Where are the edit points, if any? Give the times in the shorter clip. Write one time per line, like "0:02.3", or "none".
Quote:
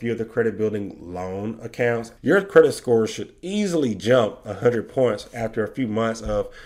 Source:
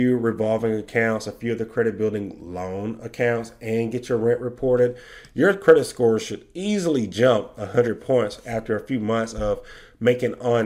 0:02.2